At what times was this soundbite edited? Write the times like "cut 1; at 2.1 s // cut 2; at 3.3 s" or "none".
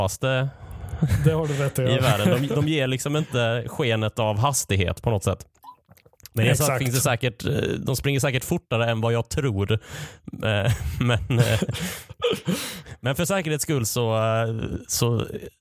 none